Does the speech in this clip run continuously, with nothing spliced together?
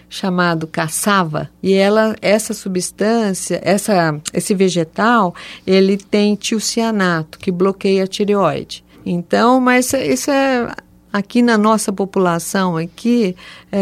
no; 2 cuts; at 1.5 s, 8.9 s

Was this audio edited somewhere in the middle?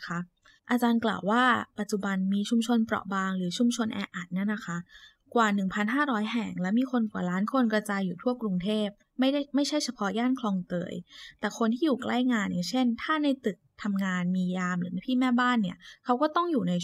no; 0 cuts

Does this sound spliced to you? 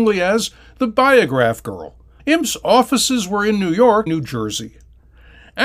yes; 2 cuts; at 2.2 s, 4.1 s

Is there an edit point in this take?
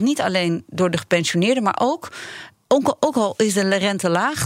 no; 0 cuts

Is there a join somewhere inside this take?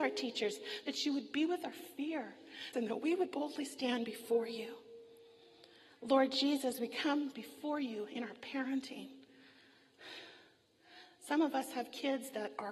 yes; 1 cut; at 2.7 s

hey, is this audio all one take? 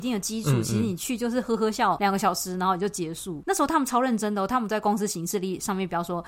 yes; 0 cuts

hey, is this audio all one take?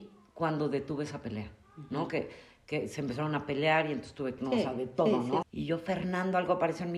no; 2 cuts; at 4.4 s, 5.4 s

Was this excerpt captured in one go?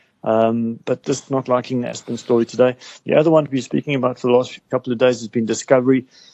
no; 1 cut; at 1.0 s

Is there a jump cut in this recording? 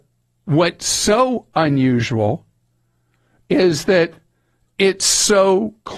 no; 0 cuts

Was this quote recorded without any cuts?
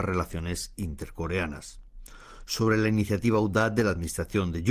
yes; 0 cuts

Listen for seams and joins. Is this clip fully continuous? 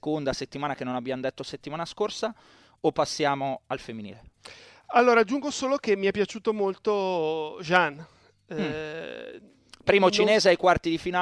yes; 0 cuts

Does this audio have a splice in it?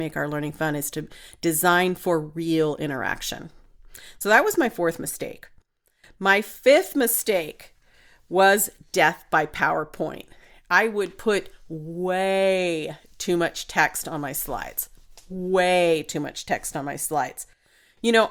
no; 0 cuts

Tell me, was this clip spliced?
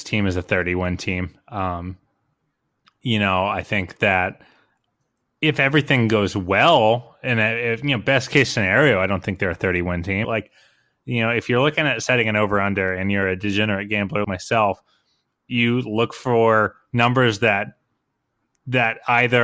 yes; 2 cuts; at 10.2 s, 14.2 s

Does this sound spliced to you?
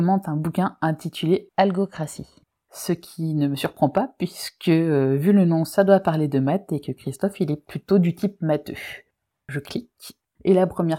no; 0 cuts

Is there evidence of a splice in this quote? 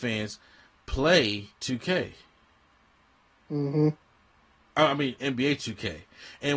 yes; 2 cuts; at 1.5 s, 5.2 s

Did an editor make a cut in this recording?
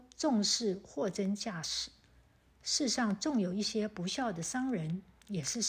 no; 0 cuts

